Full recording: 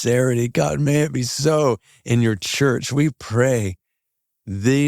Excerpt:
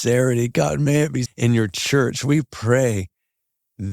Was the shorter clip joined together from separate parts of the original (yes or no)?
yes